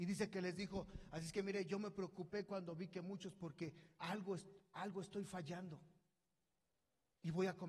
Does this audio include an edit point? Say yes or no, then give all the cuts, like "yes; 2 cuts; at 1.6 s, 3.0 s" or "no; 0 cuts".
no; 0 cuts